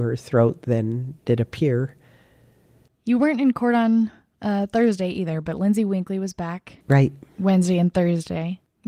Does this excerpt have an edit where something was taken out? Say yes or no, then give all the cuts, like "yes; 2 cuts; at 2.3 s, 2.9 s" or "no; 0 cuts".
yes; 1 cut; at 6.8 s